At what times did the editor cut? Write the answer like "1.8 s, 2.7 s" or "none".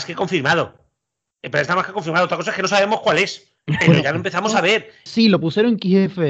3.6 s, 5.1 s